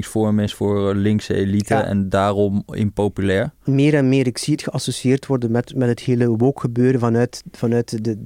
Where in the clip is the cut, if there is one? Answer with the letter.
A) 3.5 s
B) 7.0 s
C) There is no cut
C